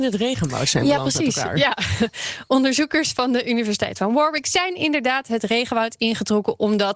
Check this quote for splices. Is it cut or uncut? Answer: uncut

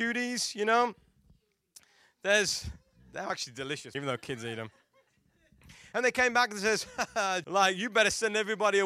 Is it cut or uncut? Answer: cut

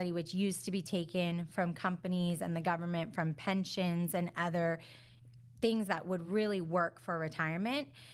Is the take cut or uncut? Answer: uncut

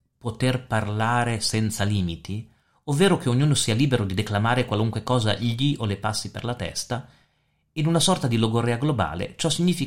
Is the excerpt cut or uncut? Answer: uncut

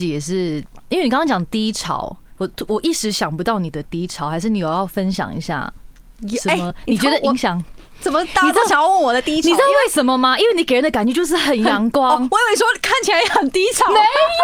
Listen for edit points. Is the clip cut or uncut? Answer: uncut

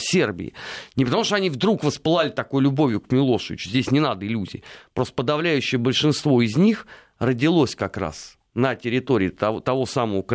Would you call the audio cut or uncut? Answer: cut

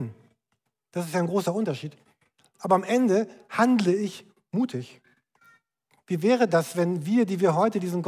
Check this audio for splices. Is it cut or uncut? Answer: uncut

